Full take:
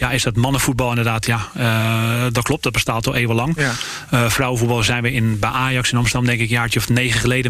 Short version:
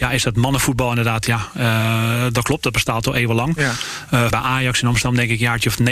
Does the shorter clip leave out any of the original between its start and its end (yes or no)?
yes